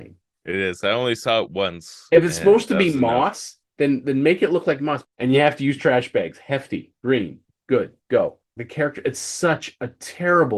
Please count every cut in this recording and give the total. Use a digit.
2